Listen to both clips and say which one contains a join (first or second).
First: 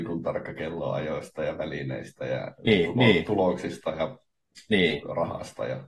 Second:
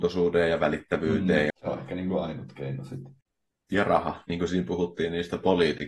second